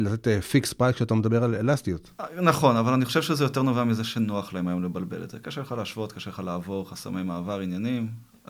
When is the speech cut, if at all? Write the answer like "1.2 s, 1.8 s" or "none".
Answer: none